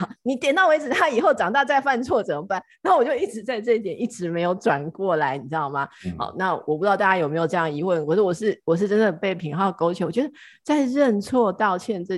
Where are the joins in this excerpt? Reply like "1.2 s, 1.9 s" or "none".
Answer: none

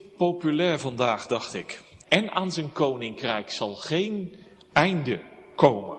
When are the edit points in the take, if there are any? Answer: 2.0 s

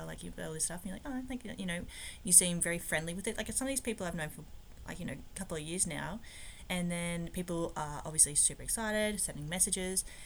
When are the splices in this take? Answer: 6.7 s

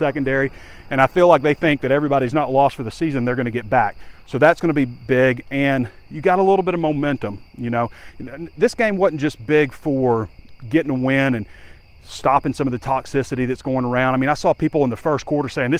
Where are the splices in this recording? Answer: none

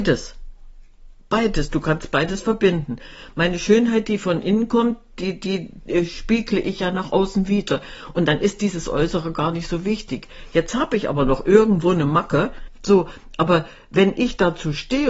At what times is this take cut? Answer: 12.8 s

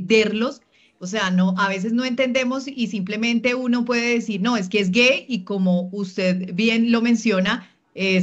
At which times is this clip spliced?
1.0 s

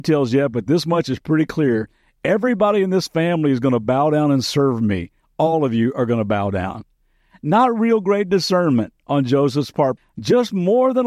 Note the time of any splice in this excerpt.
10.0 s

